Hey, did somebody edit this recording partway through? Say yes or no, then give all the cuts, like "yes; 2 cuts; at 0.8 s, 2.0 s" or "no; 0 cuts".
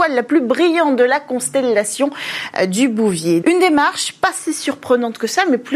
yes; 1 cut; at 3.4 s